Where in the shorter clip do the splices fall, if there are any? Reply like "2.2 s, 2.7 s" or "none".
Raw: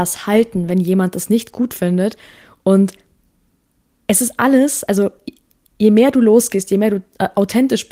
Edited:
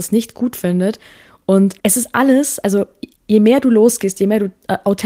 1.8 s, 3.2 s